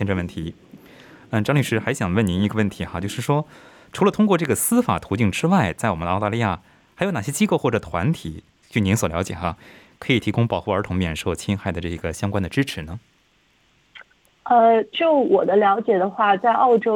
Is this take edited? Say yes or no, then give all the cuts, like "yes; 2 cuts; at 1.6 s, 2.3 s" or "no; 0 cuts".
no; 0 cuts